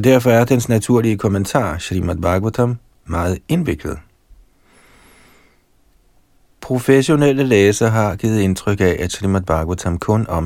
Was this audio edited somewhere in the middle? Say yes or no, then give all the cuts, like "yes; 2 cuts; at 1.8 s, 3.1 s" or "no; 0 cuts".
no; 0 cuts